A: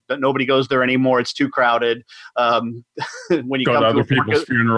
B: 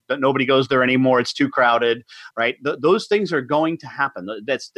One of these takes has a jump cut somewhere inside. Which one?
B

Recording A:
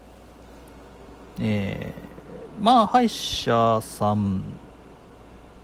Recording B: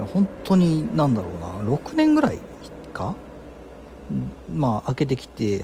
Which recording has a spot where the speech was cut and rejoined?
A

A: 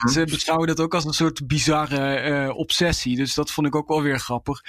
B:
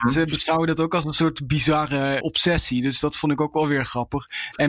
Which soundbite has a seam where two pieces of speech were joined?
B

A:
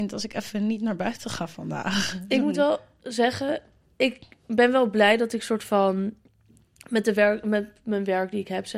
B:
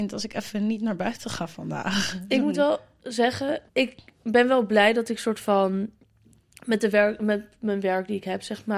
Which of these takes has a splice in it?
B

